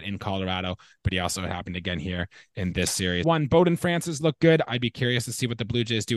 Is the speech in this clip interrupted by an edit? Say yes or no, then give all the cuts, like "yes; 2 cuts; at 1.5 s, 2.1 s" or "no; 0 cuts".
yes; 2 cuts; at 3.2 s, 4.7 s